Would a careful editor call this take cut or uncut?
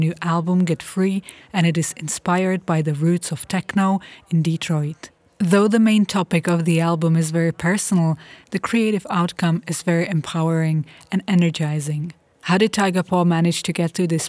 cut